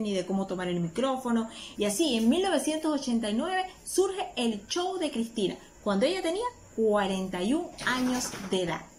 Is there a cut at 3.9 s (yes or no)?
no